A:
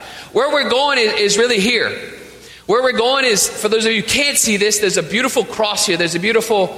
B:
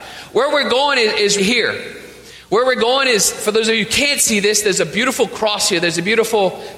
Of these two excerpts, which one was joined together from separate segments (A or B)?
B